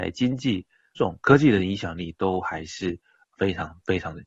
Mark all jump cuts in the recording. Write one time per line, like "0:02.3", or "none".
0:01.0